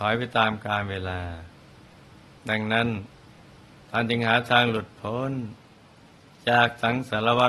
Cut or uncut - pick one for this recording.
uncut